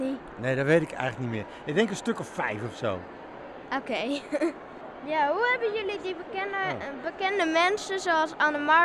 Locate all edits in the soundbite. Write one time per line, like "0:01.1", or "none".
none